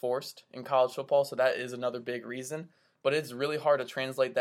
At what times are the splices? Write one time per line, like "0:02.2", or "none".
none